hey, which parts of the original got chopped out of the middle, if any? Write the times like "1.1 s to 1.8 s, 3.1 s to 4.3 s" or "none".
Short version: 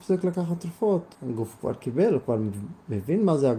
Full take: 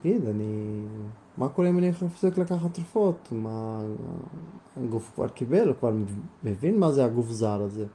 3.3 s to 4.7 s